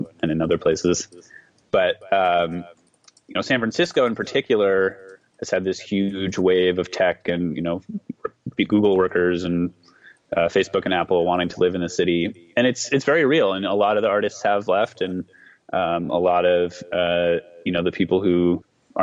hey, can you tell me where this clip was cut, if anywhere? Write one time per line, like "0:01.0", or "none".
none